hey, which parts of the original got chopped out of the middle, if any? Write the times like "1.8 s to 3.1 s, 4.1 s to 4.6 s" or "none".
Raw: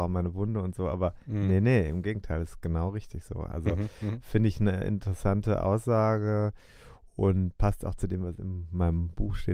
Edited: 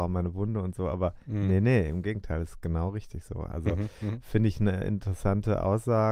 none